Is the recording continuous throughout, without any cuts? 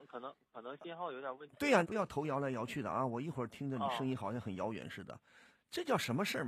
no; 2 cuts; at 1.8 s, 5.5 s

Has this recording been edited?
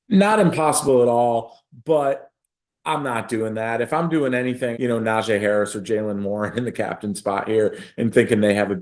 yes; 1 cut; at 4.7 s

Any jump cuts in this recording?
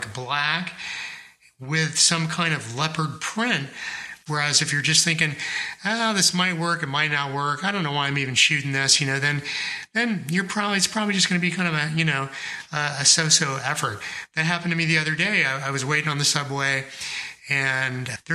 yes; 1 cut; at 4.3 s

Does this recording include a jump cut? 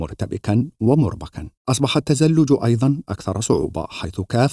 yes; 1 cut; at 1.6 s

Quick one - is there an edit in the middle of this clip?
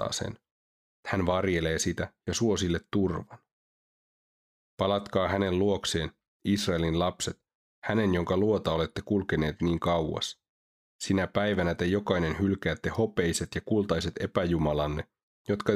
no; 0 cuts

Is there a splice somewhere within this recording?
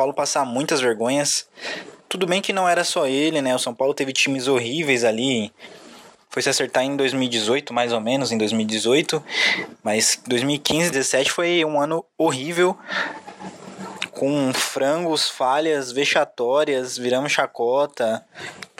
yes; 1 cut; at 10.9 s

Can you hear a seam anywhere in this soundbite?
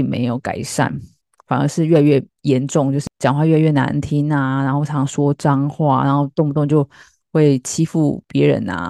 no; 0 cuts

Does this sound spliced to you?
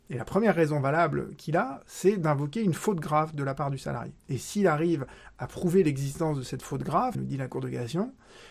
yes; 2 cuts; at 4.2 s, 7.1 s

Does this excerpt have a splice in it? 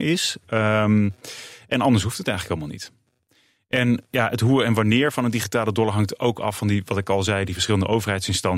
no; 0 cuts

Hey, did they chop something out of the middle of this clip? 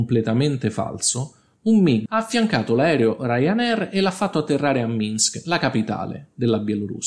yes; 1 cut; at 2.1 s

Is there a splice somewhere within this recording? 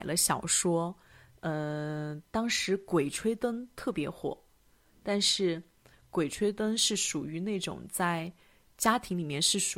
no; 0 cuts

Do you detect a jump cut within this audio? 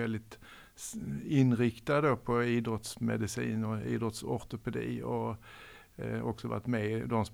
no; 0 cuts

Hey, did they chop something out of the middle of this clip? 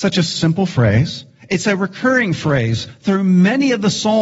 no; 0 cuts

